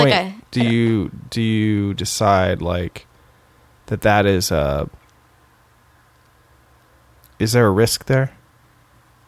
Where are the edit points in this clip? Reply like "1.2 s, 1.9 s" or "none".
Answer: none